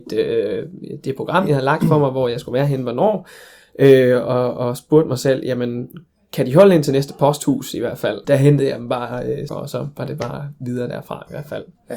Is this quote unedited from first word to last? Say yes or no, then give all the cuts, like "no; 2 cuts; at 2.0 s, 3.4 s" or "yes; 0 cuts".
no; 2 cuts; at 8.2 s, 9.5 s